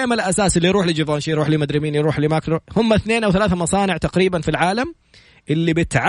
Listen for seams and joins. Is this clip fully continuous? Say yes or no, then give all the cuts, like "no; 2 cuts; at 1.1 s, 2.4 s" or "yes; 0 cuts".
no; 1 cut; at 2.7 s